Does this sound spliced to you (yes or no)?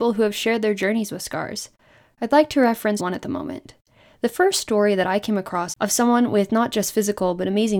yes